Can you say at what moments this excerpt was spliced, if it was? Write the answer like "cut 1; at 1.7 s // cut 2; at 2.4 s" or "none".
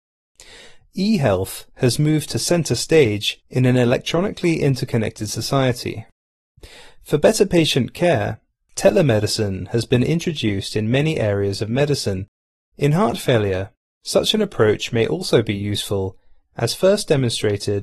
none